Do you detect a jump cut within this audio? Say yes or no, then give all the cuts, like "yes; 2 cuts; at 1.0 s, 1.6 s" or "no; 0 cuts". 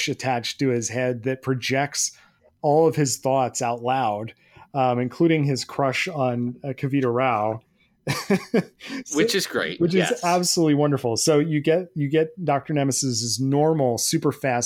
no; 0 cuts